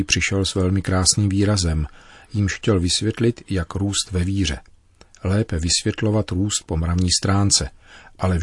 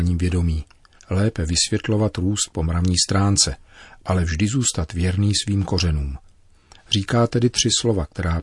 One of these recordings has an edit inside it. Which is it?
second; 1 cut; at 1.0 s

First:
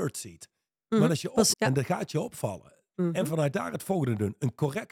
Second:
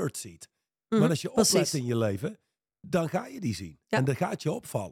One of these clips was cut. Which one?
first; 2 cuts; at 1.5 s, 2.9 s

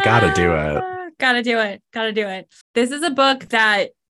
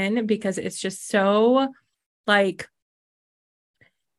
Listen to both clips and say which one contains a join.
first; 1 cut; at 2.6 s

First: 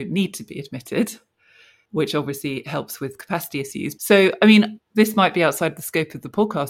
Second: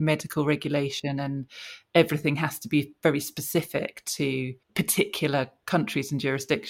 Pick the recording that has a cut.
first; 1 cut; at 4.0 s

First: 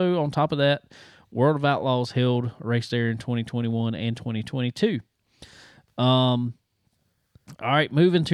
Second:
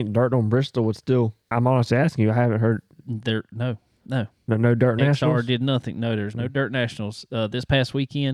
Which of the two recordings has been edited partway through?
second; 1 cut; at 1.5 s

